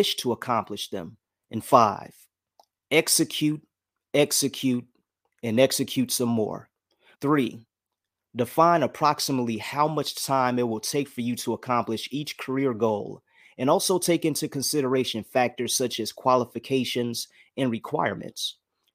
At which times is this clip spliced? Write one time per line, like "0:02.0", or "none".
0:01.4
0:07.1